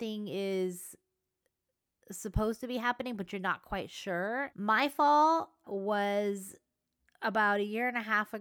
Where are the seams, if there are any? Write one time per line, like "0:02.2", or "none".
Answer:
0:04.5
0:05.6